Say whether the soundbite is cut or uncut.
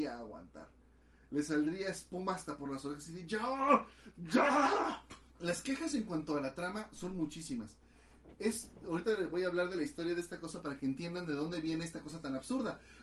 cut